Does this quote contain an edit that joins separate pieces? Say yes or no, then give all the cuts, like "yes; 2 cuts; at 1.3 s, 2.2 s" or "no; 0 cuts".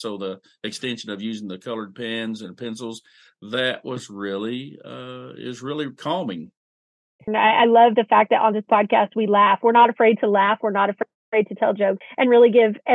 yes; 2 cuts; at 7.3 s, 12.0 s